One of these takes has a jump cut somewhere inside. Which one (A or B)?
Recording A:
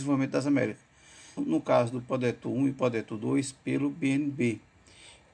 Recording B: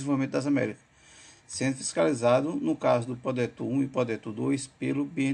A